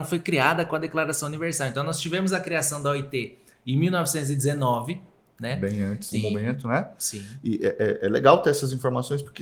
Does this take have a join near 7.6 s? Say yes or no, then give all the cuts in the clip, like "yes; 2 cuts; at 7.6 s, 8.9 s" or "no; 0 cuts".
no; 1 cut; at 6.1 s